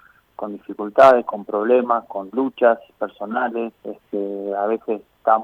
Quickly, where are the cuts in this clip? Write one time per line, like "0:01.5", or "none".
0:03.8